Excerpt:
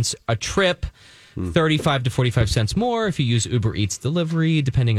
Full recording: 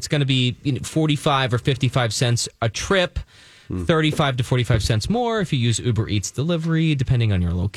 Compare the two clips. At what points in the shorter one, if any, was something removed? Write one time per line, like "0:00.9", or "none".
none